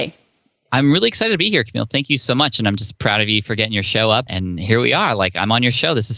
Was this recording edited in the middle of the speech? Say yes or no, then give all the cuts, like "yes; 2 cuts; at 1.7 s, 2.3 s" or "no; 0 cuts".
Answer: no; 0 cuts